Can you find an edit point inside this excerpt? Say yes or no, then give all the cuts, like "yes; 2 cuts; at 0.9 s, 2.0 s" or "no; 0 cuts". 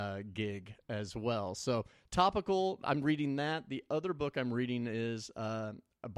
no; 0 cuts